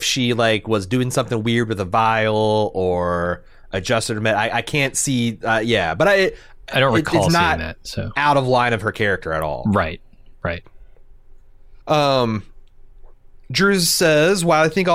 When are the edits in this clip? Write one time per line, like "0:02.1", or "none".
0:11.8